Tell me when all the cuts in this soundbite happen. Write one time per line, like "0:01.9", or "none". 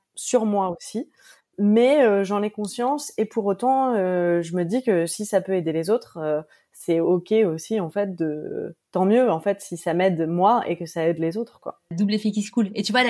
none